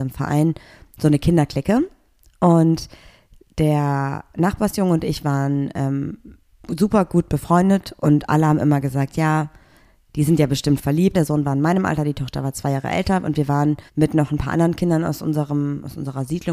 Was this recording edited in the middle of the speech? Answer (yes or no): yes